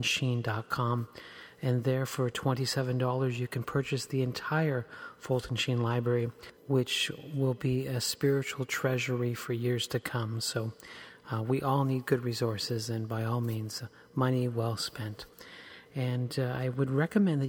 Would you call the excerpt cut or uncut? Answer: cut